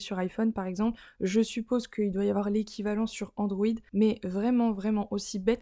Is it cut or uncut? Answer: uncut